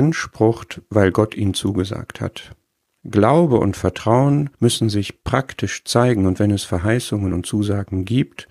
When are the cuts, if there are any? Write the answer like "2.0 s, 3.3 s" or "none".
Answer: 3.0 s, 4.5 s

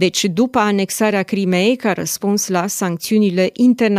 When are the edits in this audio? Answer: none

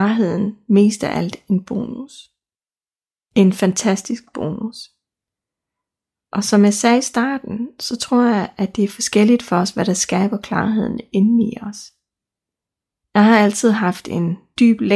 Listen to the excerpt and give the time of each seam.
none

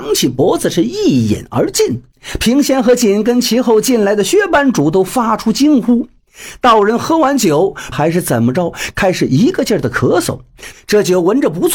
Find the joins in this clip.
7.9 s, 10.7 s

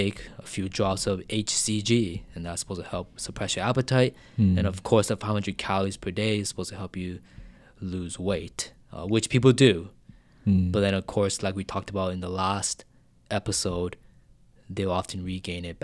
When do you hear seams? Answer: none

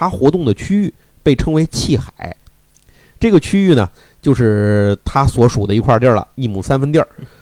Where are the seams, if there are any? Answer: none

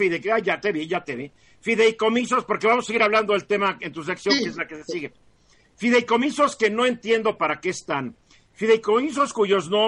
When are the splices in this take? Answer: none

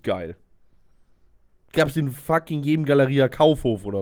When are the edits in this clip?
none

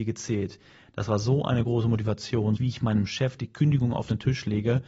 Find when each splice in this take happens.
2.6 s

